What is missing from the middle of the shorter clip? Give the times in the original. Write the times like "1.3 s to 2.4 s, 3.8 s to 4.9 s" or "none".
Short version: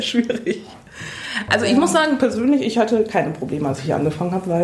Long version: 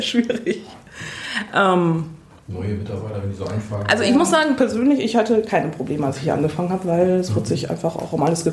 1.5 s to 3.9 s